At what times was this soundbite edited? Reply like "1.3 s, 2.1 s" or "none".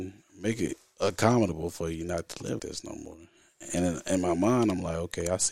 2.6 s